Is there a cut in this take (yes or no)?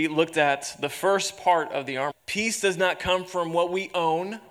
yes